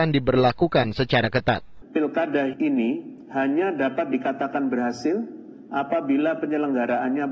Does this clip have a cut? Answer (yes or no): yes